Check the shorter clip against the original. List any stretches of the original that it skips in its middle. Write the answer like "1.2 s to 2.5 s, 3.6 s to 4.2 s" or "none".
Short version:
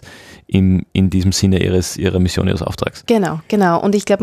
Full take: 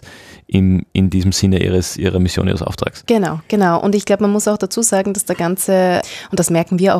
none